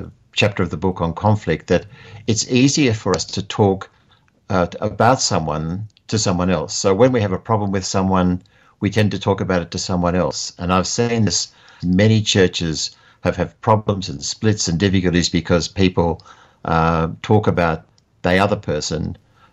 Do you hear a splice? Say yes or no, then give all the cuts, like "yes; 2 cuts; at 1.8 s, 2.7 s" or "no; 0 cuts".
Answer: yes; 1 cut; at 11.8 s